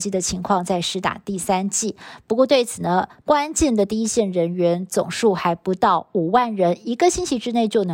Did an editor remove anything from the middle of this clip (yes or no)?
yes